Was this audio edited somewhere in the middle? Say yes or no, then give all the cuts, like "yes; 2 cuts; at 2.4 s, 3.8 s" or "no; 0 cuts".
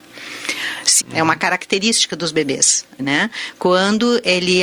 yes; 2 cuts; at 1.0 s, 3.0 s